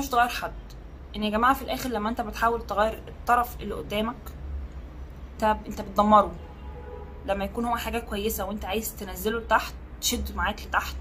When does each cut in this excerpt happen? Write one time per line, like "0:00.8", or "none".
0:05.4